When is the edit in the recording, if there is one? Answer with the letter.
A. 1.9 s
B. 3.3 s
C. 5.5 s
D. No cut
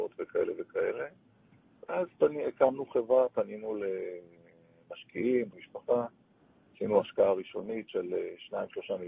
C